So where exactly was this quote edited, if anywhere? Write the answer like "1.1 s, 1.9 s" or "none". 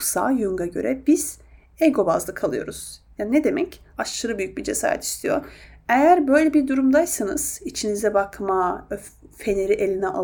3.9 s